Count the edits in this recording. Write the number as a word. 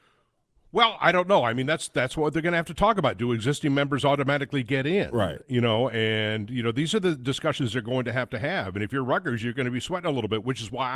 zero